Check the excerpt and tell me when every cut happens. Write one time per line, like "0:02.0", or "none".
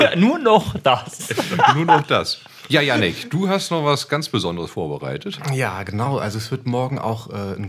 none